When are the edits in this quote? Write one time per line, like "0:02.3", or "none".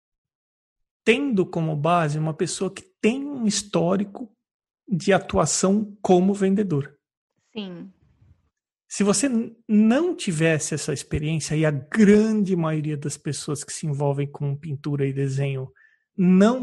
none